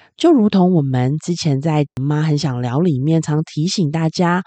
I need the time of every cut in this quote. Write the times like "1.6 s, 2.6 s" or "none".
3.2 s